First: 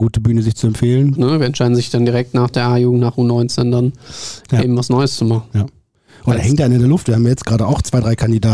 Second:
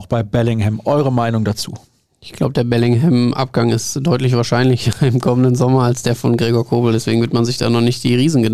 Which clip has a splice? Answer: first; 1 cut; at 1.2 s

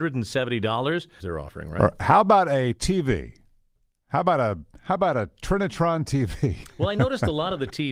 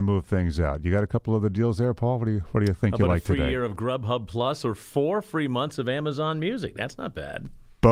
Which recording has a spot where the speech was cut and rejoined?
first; 1 cut; at 1.2 s

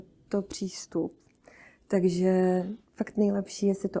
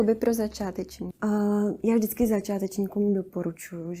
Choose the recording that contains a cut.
second; 1 cut; at 1.1 s

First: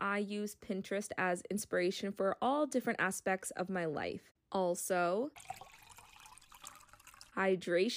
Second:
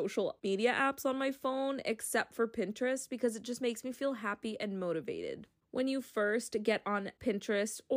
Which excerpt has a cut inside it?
first; 1 cut; at 4.4 s

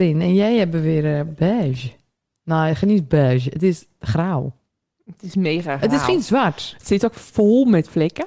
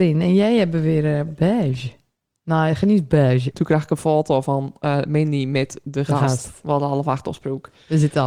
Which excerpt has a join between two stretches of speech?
second; 1 cut; at 3.5 s

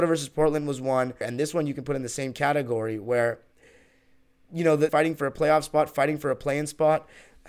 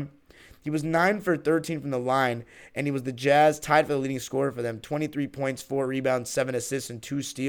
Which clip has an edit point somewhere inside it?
first; 2 cuts; at 1.2 s, 4.9 s

